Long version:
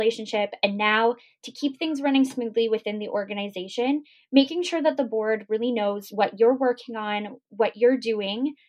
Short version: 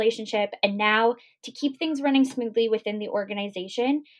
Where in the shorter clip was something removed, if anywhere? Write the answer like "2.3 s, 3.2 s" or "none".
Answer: none